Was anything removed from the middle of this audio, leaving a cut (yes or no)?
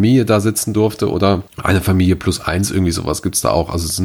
yes